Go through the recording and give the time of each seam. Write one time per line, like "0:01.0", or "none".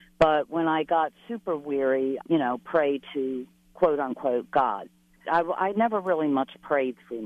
0:02.2
0:05.2